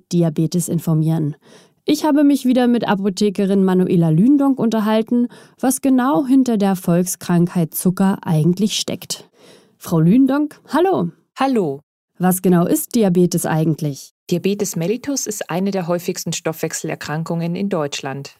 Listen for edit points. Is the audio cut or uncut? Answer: uncut